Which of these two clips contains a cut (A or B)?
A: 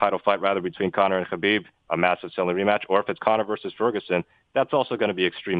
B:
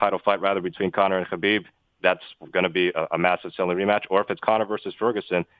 A